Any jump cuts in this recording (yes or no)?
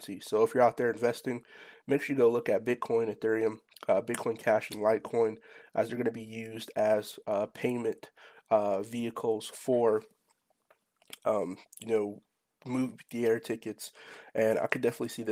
no